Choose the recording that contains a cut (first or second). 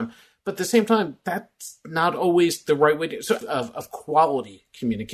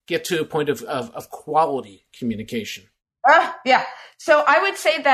first